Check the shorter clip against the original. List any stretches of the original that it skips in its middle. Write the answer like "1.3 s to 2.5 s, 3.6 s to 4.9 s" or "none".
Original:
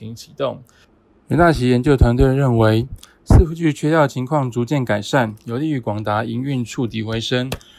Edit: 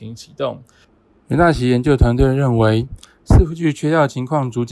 none